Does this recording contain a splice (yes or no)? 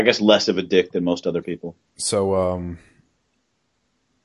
yes